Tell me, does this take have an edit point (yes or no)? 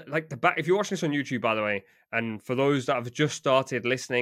no